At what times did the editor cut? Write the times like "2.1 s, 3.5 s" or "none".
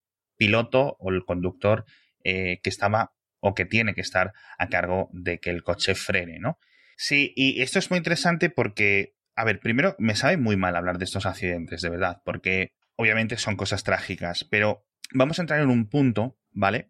6.9 s